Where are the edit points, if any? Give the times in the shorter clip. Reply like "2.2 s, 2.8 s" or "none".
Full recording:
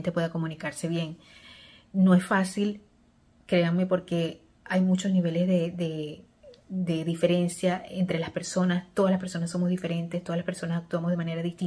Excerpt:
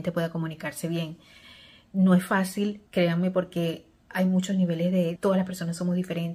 2.9 s, 5.2 s